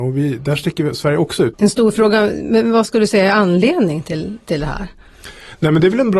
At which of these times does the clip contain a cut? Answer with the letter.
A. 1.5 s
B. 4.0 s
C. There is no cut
A